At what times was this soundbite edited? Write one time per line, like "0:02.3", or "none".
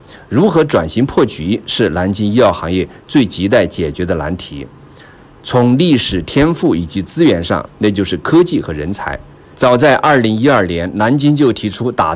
0:07.7
0:09.5